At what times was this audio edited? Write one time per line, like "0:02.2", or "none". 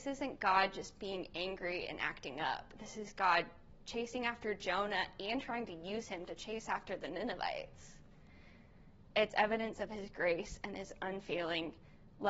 none